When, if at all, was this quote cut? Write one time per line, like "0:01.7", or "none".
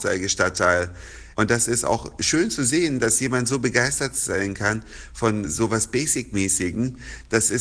0:01.4
0:05.5